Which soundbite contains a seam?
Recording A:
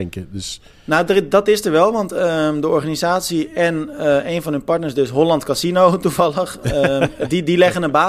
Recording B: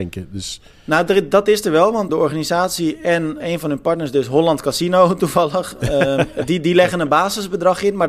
B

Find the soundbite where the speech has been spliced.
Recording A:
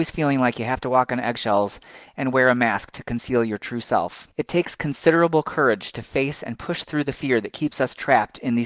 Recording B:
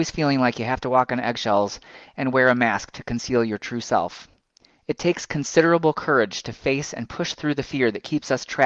A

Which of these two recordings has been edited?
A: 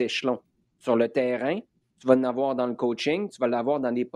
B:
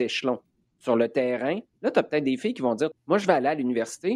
B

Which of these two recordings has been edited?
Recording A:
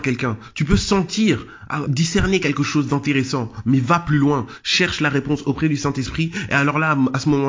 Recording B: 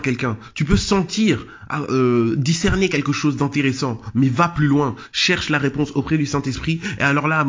A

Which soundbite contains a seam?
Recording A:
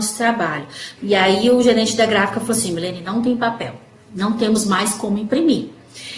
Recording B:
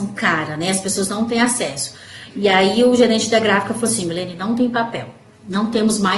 A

